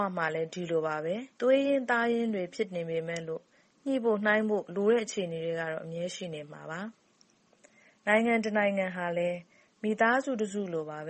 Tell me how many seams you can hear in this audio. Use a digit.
1